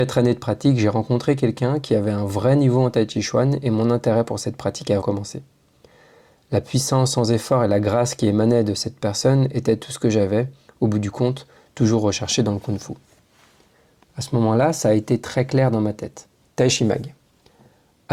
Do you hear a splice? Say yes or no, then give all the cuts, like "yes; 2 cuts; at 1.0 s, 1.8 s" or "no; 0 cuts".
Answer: yes; 2 cuts; at 5.0 s, 16.4 s